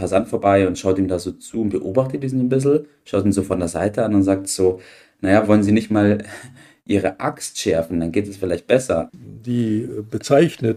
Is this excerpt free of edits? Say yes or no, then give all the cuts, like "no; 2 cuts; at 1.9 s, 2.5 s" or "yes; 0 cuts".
no; 1 cut; at 9.1 s